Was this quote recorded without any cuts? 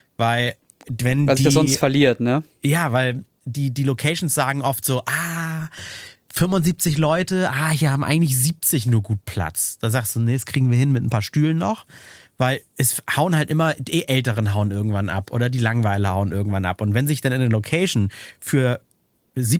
yes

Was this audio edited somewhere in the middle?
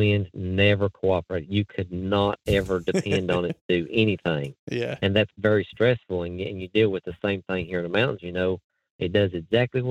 yes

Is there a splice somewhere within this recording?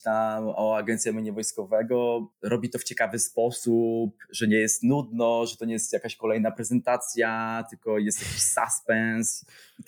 no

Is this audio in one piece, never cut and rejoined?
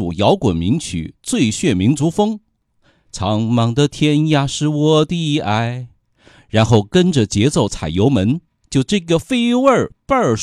no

